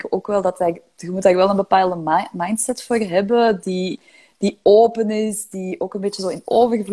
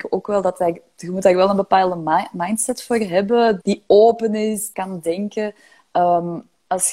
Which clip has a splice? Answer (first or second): second